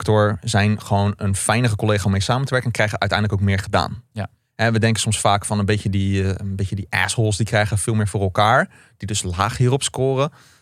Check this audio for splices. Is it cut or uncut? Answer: uncut